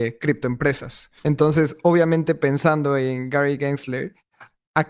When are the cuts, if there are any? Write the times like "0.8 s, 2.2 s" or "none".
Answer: 1.2 s